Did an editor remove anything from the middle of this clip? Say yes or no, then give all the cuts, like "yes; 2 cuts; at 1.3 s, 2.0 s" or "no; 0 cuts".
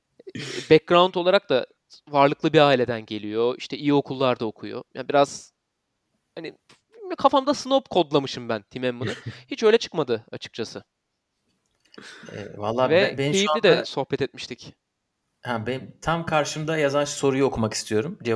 no; 0 cuts